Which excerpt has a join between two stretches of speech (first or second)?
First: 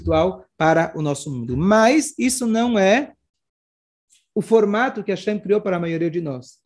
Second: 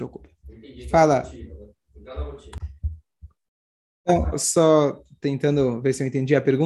second